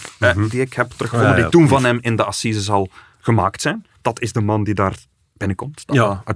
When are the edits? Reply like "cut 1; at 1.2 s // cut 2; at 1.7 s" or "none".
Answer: none

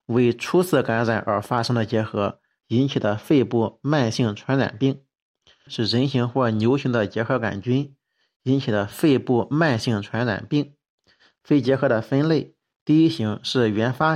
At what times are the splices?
cut 1; at 2.6 s // cut 2; at 5.7 s

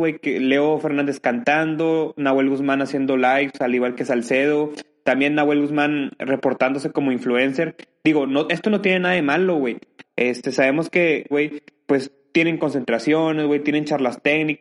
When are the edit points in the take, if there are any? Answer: cut 1; at 10.0 s // cut 2; at 11.3 s

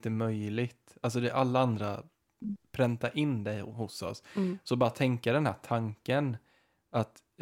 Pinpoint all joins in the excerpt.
none

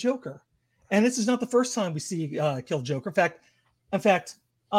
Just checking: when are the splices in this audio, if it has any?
none

